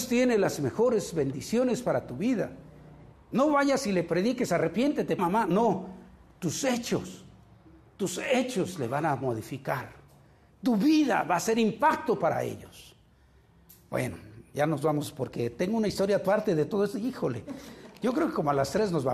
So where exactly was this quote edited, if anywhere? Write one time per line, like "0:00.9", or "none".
0:03.1
0:05.2